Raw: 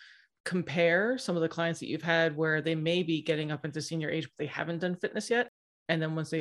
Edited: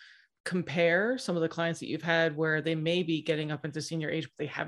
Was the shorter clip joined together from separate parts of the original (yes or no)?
no